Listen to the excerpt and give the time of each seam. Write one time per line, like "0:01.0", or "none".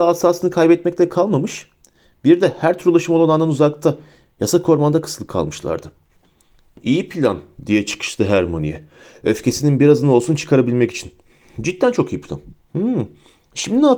none